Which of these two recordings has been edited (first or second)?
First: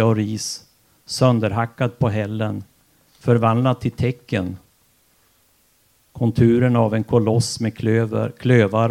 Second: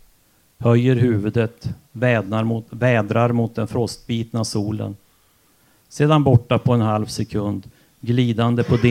first